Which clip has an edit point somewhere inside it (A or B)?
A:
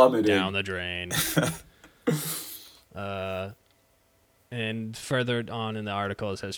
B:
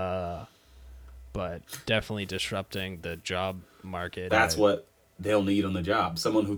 B